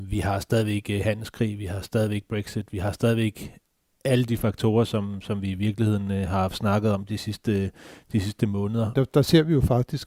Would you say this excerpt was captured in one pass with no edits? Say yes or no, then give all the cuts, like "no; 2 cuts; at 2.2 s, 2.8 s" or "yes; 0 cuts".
no; 1 cut; at 8.9 s